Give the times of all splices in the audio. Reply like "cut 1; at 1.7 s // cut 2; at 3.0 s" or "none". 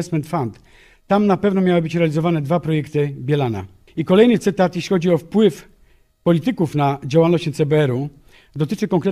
cut 1; at 3.9 s